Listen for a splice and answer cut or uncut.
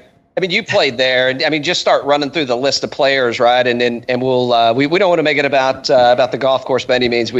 uncut